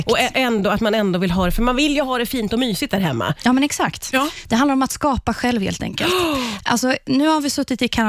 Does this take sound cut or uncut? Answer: cut